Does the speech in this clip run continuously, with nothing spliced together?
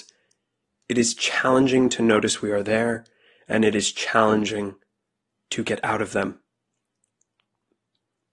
yes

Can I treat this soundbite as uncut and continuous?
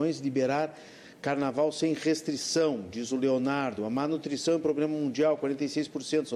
yes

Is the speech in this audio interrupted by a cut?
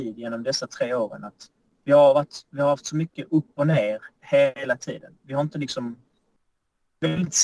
no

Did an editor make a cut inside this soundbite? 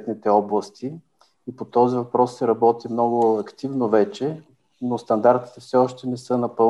no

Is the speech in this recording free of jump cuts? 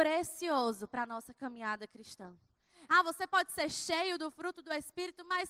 no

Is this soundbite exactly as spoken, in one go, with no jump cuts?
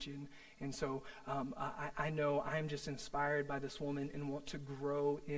yes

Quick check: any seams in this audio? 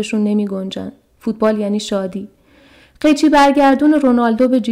no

